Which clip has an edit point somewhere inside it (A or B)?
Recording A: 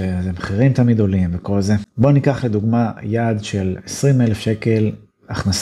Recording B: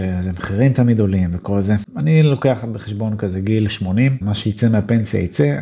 B